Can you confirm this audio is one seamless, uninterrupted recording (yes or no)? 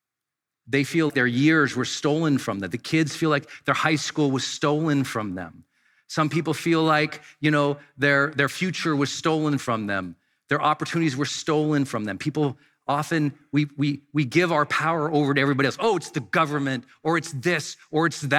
no